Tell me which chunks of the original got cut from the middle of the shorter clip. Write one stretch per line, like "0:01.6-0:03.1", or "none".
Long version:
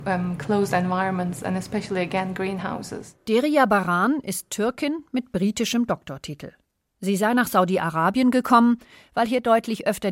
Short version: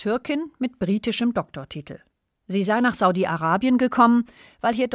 none